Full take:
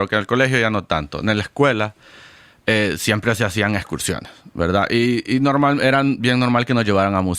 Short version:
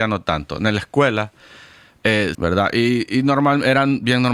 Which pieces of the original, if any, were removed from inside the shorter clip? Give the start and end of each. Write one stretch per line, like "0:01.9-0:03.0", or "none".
0:03.0-0:04.5